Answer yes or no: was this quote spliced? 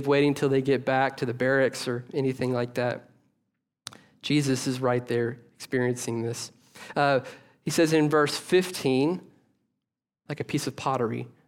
yes